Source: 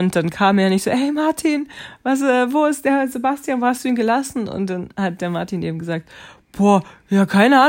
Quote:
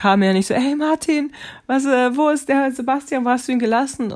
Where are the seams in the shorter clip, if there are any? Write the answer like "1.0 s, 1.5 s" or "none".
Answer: none

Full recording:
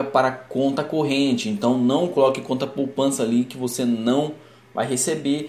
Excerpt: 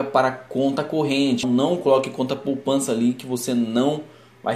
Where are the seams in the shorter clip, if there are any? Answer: 1.4 s

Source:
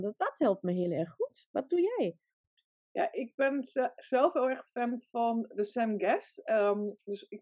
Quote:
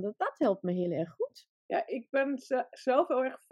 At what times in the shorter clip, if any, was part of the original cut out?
1.5 s

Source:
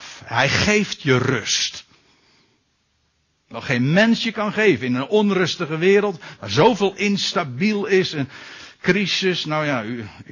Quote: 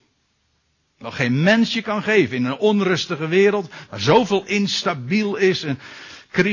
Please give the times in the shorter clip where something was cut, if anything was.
none

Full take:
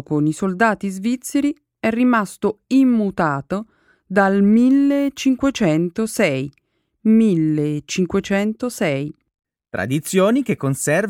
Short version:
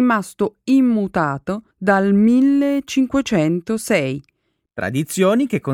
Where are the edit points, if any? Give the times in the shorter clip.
1.7 s, 4.7 s

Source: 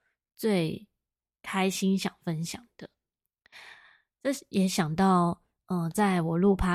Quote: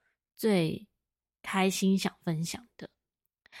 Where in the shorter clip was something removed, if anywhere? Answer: none

